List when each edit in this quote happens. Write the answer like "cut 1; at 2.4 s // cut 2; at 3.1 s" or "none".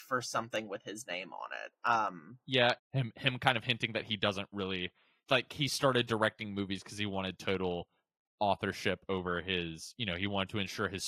cut 1; at 2.8 s

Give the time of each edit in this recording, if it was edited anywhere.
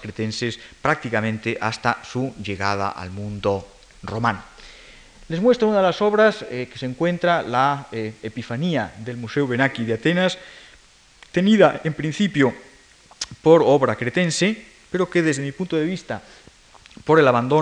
none

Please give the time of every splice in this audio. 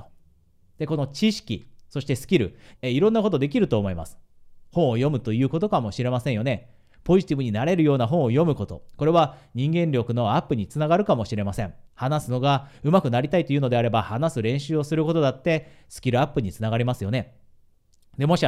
cut 1; at 2.8 s // cut 2; at 11.9 s

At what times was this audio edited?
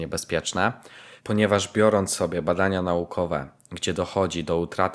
cut 1; at 1.2 s

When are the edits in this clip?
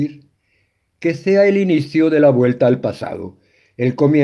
none

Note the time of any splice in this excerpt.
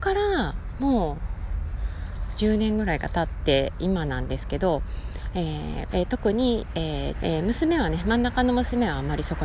cut 1; at 5.9 s // cut 2; at 7.1 s

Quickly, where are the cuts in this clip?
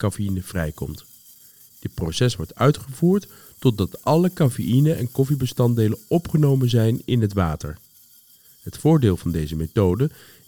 none

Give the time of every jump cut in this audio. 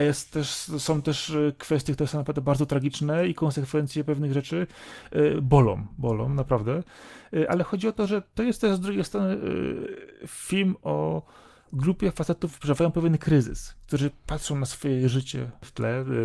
none

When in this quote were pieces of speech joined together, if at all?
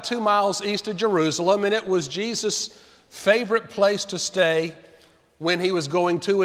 none

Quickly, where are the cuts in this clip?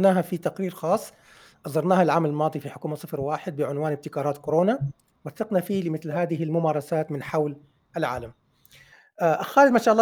none

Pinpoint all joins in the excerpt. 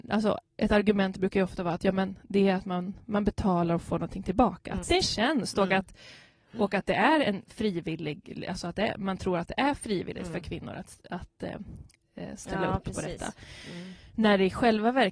cut 1; at 4.8 s

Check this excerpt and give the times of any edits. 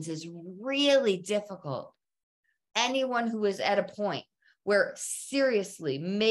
none

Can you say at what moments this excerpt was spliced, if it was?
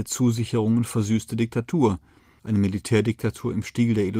cut 1; at 2.4 s

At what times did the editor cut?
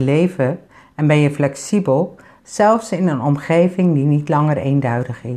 none

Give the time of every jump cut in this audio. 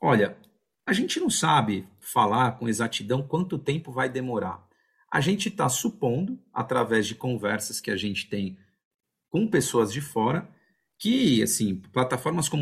none

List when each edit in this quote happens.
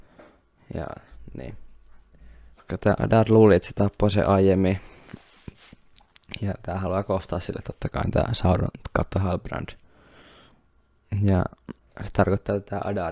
cut 1; at 2.5 s

